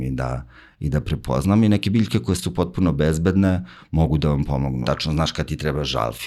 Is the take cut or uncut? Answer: cut